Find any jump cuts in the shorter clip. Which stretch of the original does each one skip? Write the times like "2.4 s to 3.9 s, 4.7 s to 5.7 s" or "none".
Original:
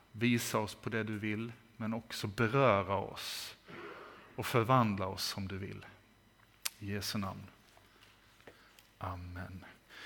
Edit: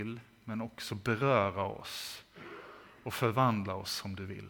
none